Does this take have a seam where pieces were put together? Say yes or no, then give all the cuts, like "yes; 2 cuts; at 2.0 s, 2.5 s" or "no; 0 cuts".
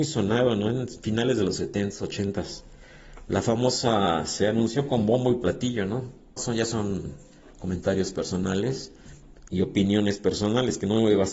yes; 2 cuts; at 6.4 s, 9.5 s